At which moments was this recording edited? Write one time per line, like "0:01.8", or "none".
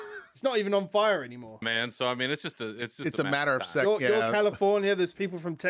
0:01.6